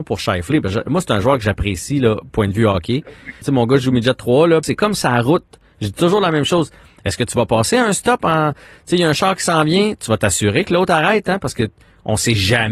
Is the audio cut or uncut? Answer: cut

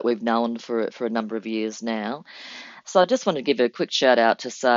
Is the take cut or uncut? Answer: cut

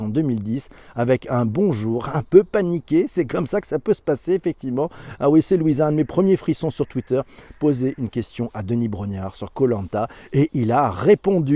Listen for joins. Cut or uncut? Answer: uncut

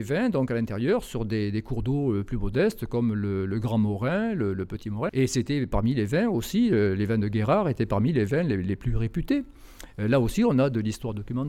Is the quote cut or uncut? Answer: cut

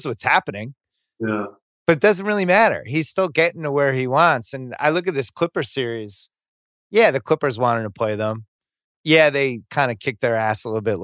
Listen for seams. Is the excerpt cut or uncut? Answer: uncut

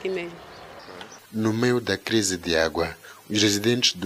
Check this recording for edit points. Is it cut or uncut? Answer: cut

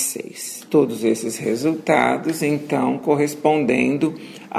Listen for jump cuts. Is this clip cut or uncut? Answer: uncut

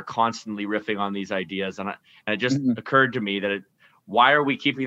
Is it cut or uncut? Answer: uncut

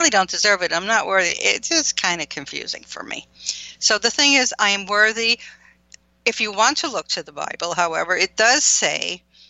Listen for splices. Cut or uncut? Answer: uncut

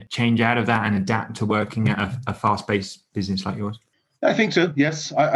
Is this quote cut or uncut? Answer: uncut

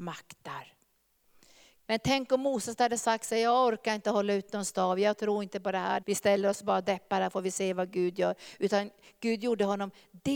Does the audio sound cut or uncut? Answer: cut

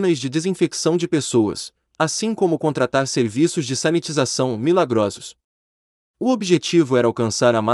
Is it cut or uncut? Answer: uncut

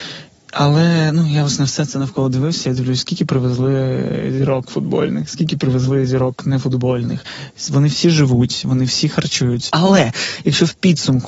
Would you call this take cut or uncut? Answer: cut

